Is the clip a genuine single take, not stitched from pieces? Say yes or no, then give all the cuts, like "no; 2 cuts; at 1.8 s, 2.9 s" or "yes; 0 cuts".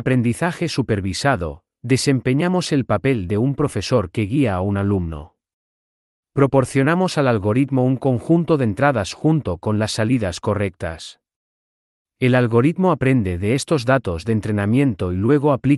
yes; 0 cuts